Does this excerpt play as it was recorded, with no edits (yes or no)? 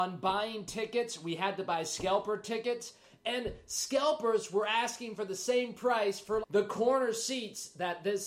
no